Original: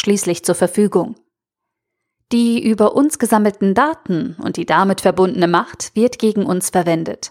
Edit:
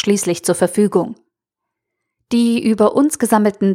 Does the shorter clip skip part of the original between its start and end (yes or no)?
no